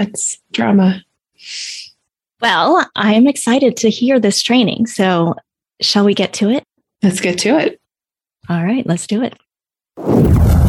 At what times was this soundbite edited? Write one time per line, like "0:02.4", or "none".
none